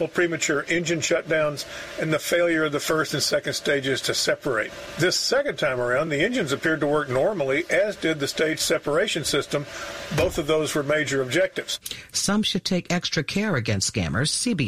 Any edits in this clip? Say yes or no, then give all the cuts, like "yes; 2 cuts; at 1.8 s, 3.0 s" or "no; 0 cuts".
no; 0 cuts